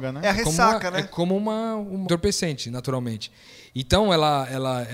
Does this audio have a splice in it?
yes; 1 cut; at 2.0 s

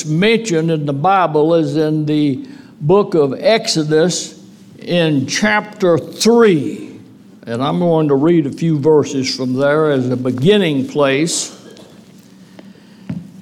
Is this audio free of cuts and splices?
yes; 0 cuts

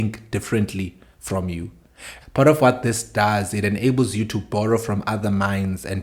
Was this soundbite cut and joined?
yes; 1 cut; at 2.2 s

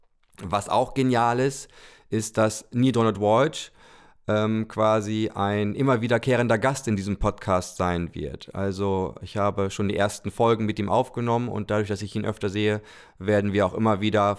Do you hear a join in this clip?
no; 0 cuts

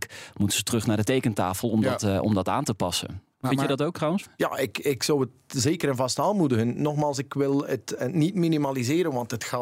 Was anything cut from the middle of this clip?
no; 0 cuts

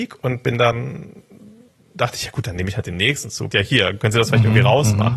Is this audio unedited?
no; 1 cut; at 3.5 s

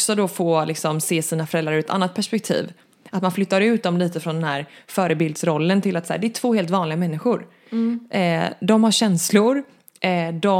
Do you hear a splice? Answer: no; 0 cuts

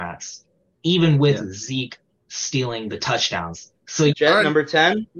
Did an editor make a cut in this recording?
yes; 1 cut; at 4.1 s

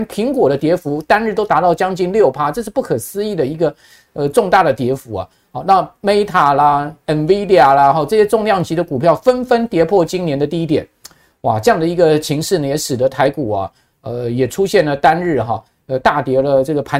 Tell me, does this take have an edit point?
no; 0 cuts

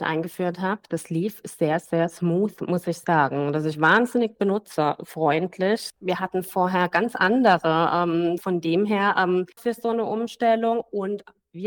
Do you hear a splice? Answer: yes; 2 cuts; at 8.4 s, 9.6 s

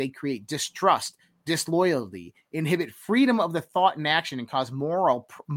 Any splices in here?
no; 0 cuts

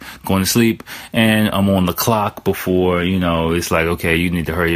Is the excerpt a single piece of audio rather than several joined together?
yes; 0 cuts

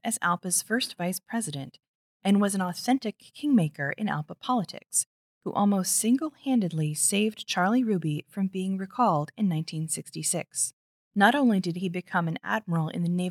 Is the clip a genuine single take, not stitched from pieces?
no; 1 cut; at 10.9 s

